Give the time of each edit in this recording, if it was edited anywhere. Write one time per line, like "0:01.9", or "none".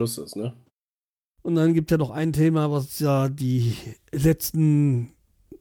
0:01.3

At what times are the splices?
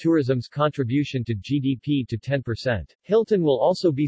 0:02.9

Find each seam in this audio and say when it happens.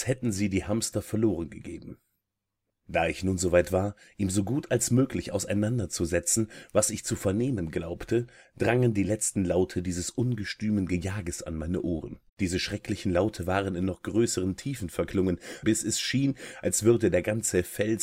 0:02.7
0:12.3
0:15.6

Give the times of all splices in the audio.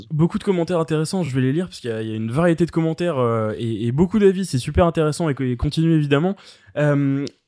none

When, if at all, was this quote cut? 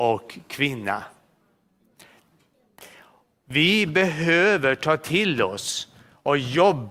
none

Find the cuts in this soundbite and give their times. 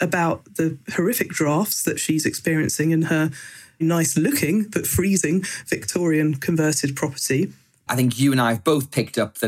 0:03.8
0:07.9

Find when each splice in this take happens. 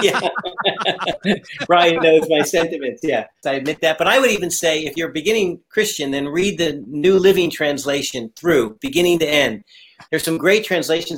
0:03.4
0:10.1

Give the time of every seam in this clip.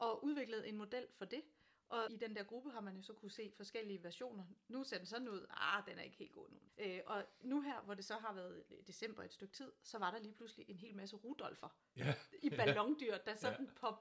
0:02.1
0:06.7

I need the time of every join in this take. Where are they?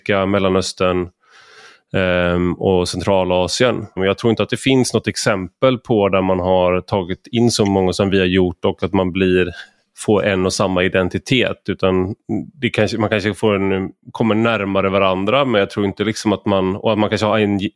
0:04.0

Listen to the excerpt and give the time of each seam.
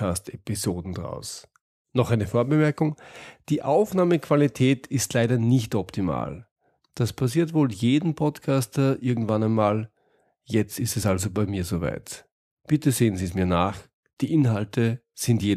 none

